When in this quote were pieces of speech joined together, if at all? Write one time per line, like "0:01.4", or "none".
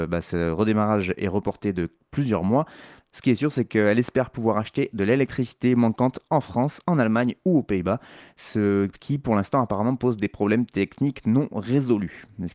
0:03.0